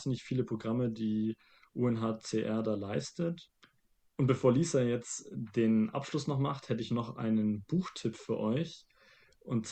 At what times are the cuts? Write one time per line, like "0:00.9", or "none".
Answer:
none